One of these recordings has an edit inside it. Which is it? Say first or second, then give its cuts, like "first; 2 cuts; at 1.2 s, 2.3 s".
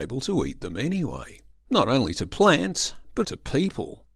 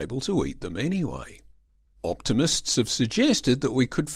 first; 2 cuts; at 1.6 s, 3.2 s